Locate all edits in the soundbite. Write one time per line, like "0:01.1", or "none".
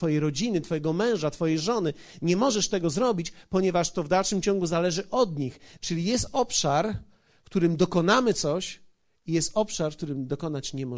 0:05.8